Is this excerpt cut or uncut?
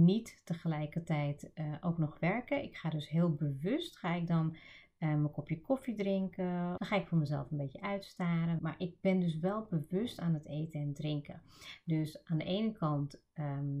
cut